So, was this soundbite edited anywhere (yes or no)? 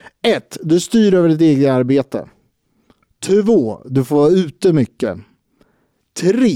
no